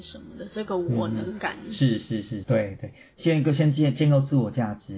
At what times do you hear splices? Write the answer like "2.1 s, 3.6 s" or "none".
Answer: 2.4 s